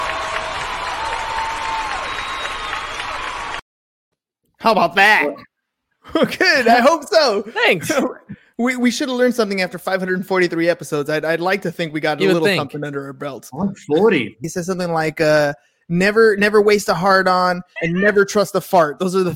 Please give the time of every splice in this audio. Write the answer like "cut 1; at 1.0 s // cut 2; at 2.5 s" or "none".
cut 1; at 5.9 s // cut 2; at 14.4 s // cut 3; at 17.8 s